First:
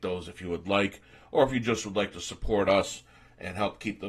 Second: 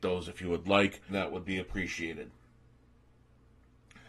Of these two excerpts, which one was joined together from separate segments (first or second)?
second